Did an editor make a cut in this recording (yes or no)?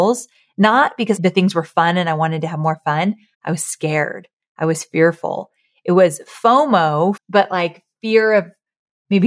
yes